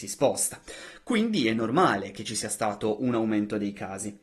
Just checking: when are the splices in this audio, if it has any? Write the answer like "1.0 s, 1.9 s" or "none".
none